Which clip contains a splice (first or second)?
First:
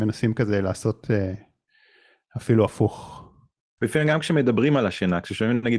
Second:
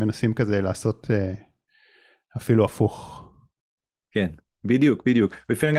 first